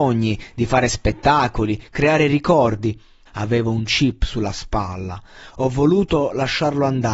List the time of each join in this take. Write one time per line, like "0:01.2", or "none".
0:03.3